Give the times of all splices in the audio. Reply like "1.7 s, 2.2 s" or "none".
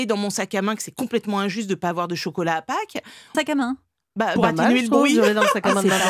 3.3 s, 4.4 s